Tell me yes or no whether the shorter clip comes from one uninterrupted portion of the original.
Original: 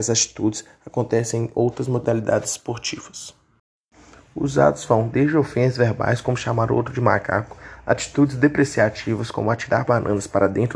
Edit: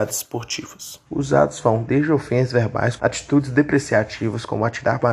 no